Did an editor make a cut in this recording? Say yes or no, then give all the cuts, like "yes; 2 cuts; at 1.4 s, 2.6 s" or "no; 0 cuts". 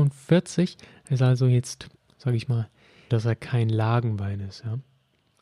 yes; 1 cut; at 3.1 s